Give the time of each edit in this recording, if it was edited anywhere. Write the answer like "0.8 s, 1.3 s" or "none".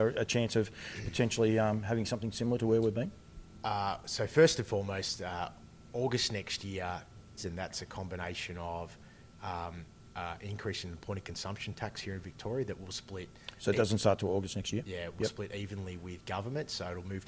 7.4 s